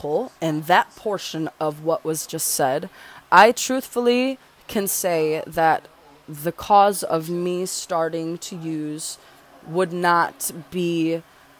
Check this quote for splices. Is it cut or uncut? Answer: uncut